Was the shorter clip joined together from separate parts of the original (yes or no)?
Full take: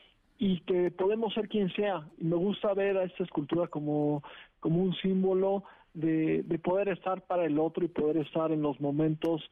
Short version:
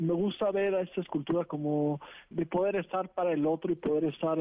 yes